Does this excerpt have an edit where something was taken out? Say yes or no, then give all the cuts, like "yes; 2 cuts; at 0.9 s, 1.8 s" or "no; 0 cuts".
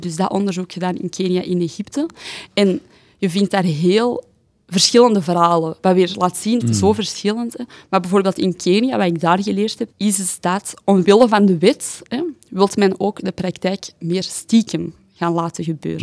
yes; 2 cuts; at 6.6 s, 9.9 s